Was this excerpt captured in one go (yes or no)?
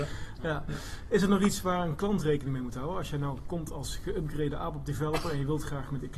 yes